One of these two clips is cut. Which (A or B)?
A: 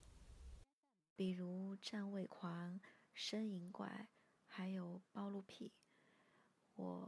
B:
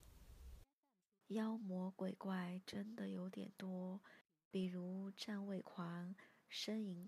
A